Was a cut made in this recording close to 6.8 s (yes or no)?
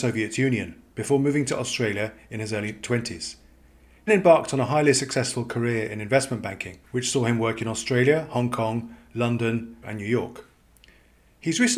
yes